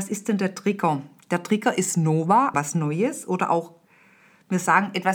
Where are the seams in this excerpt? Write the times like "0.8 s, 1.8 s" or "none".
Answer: 2.5 s